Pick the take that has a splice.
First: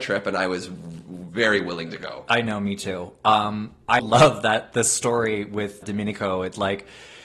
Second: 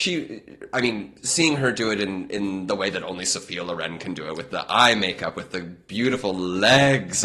first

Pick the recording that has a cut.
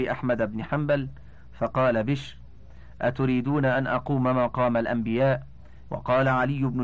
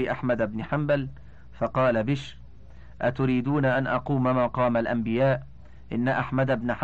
first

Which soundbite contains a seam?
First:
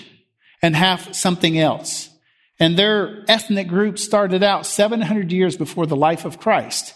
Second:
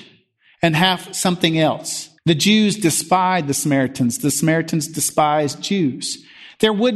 second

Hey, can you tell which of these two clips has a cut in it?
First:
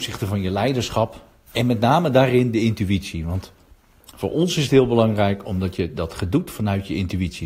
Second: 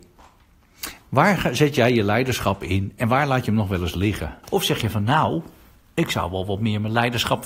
second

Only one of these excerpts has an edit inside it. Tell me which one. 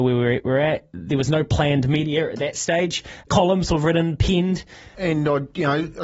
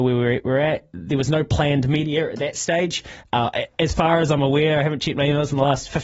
first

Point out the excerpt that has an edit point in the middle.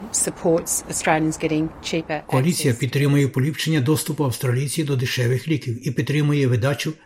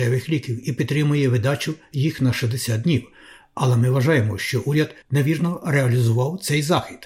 second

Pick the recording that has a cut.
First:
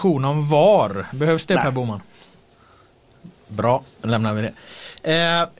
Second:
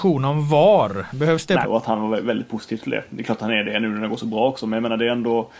second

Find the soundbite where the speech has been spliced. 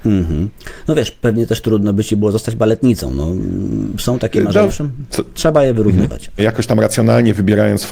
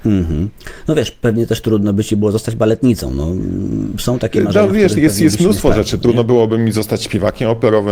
first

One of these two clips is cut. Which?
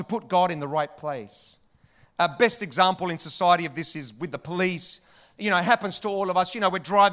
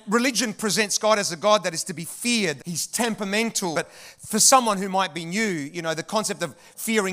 second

